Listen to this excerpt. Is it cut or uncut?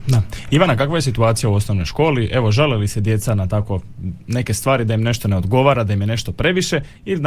uncut